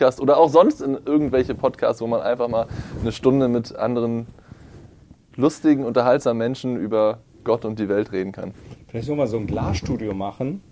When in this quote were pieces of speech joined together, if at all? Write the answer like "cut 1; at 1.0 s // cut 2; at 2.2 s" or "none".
none